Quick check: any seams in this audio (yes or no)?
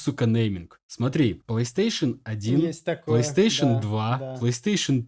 no